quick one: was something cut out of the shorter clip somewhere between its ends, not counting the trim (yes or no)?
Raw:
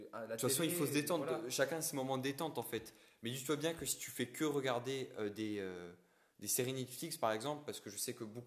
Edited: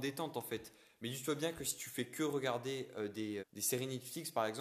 yes